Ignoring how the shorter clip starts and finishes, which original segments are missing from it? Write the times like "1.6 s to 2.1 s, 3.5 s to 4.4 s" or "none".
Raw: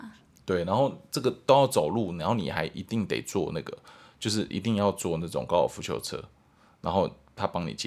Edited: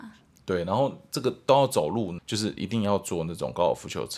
2.2 s to 4.1 s